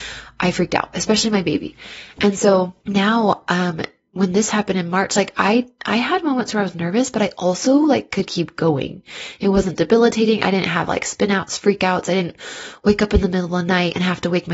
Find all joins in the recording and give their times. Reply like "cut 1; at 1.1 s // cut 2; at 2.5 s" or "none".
cut 1; at 2.8 s